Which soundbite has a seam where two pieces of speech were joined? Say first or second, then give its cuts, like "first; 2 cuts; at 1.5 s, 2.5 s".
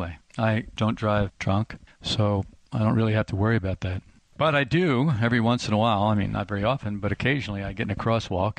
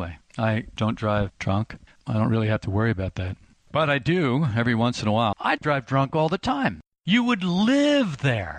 second; 3 cuts; at 2.0 s, 5.3 s, 6.9 s